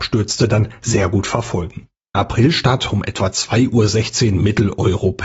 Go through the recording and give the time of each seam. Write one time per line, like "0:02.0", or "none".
0:02.1